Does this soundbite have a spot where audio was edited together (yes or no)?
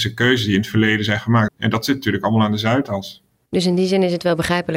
yes